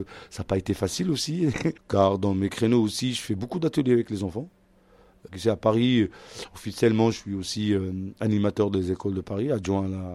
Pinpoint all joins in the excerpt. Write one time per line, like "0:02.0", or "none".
0:01.8
0:05.3